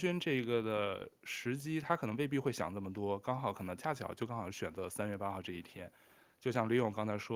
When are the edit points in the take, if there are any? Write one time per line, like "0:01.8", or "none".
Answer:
0:06.2